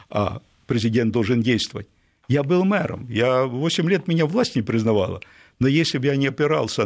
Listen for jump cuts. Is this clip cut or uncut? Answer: uncut